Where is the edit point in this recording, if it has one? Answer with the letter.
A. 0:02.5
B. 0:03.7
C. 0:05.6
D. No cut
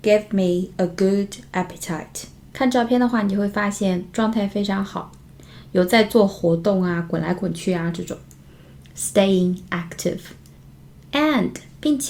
A